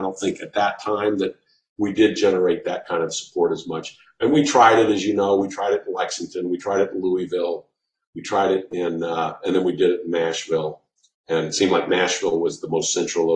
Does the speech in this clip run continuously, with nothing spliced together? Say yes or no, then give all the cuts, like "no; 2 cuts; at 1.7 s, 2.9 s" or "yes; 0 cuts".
yes; 0 cuts